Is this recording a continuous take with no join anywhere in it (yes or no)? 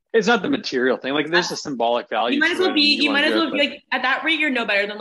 yes